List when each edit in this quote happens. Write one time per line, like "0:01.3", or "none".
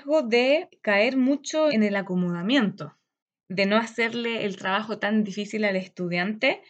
0:01.7